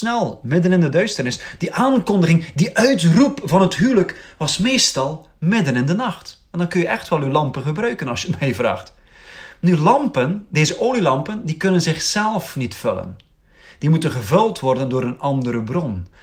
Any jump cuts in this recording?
yes; 1 cut; at 1.6 s

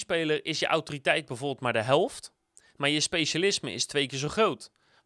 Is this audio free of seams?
yes; 0 cuts

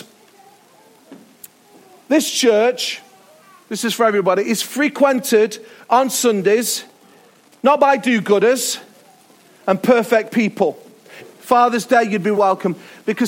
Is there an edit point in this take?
yes; 2 cuts; at 11.2 s, 12.4 s

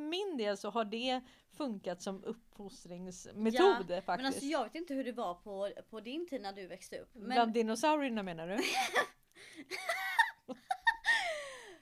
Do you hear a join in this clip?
no; 0 cuts

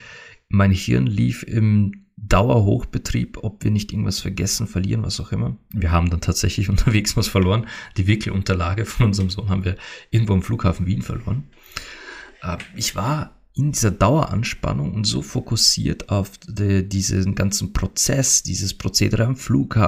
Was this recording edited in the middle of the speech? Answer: no; 0 cuts

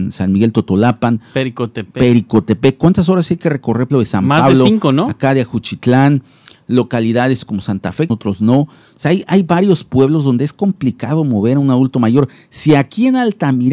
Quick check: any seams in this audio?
yes; 2 cuts; at 3.9 s, 8.1 s

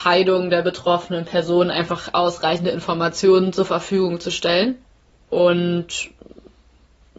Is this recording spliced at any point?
yes; 1 cut; at 5.3 s

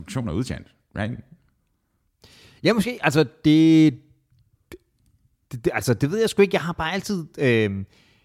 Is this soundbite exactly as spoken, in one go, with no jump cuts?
yes; 0 cuts

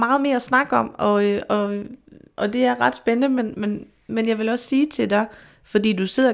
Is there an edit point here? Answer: no; 0 cuts

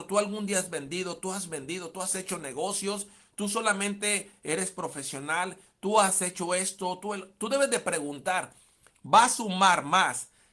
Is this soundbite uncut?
no; 1 cut; at 8.9 s

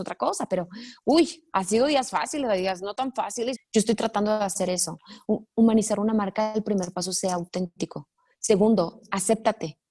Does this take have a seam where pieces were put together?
yes; 1 cut; at 3.5 s

